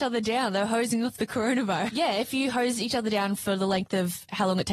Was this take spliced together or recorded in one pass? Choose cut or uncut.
cut